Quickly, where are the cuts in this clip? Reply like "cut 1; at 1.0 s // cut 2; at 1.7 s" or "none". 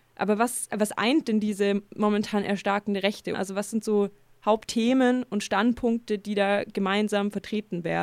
cut 1; at 3.3 s

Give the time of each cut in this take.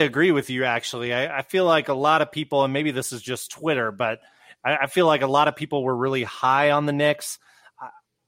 none

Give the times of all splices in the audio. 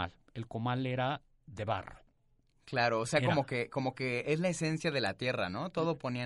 none

